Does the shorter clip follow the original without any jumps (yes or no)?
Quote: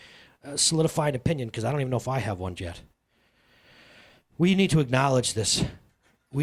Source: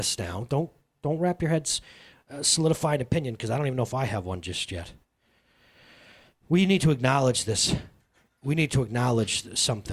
no